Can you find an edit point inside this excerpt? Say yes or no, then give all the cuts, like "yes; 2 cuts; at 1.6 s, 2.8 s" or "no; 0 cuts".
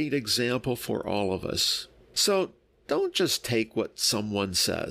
yes; 1 cut; at 2.1 s